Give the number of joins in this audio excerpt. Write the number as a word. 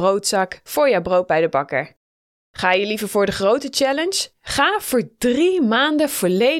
one